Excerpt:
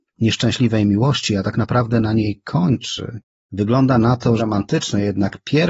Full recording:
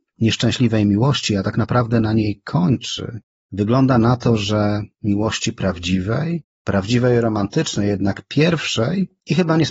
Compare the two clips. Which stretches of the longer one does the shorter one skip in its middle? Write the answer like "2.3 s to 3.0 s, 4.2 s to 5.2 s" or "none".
4.4 s to 7.2 s